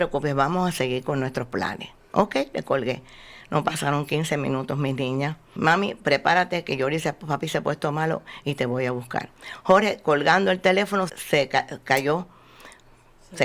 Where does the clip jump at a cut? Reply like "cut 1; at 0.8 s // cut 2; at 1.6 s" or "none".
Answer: cut 1; at 5.6 s // cut 2; at 11.1 s